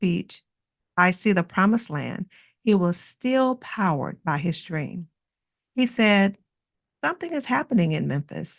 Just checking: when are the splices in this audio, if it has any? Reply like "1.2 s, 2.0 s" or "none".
5.7 s